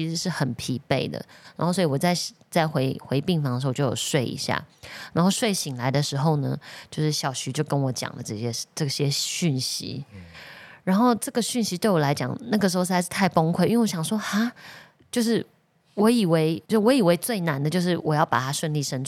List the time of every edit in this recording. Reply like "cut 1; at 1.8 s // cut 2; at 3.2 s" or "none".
cut 1; at 16.6 s